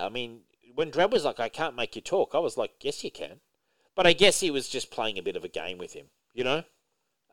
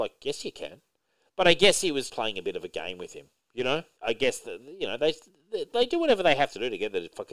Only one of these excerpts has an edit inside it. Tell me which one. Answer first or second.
second